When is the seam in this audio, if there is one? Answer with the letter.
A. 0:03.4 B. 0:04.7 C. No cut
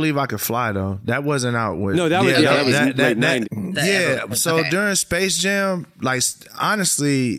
A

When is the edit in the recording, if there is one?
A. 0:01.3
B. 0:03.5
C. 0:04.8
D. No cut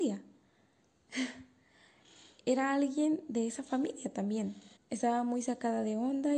C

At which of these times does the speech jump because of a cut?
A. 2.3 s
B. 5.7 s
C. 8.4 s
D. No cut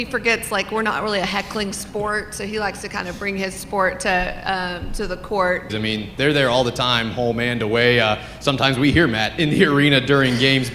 B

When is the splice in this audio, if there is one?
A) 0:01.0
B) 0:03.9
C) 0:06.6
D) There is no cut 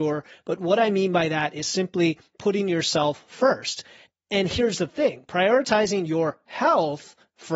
D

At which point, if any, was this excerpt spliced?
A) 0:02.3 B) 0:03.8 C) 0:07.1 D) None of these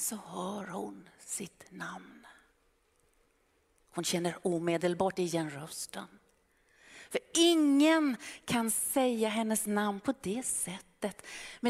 D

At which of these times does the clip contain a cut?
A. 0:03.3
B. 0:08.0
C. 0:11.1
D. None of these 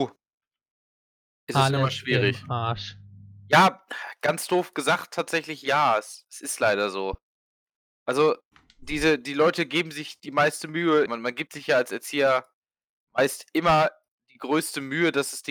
C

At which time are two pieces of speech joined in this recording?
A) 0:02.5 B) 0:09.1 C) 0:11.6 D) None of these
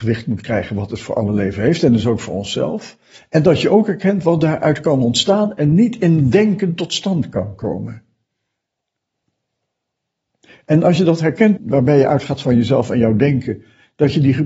C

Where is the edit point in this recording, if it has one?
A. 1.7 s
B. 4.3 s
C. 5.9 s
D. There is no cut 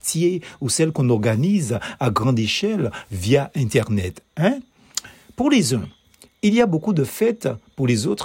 D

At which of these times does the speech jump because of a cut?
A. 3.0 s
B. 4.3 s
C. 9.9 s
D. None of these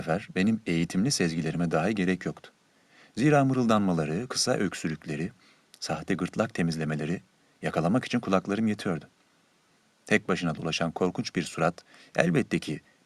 D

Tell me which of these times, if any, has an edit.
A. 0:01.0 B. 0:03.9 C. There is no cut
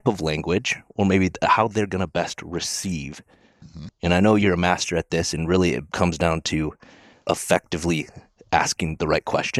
B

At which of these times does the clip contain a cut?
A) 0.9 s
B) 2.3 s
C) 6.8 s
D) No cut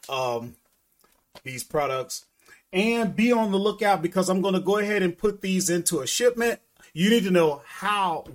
C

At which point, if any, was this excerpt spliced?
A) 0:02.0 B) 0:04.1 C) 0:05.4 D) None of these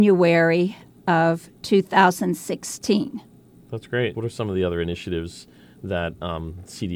B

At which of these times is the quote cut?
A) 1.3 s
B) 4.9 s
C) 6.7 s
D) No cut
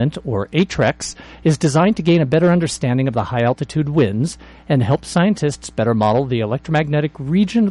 D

